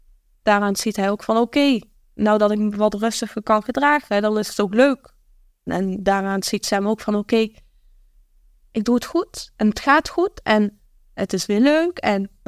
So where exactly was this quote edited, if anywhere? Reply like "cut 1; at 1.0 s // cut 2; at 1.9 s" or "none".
cut 1; at 5.7 s